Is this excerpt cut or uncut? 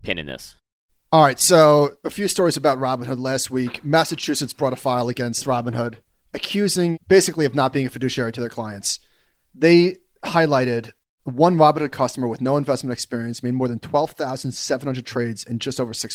uncut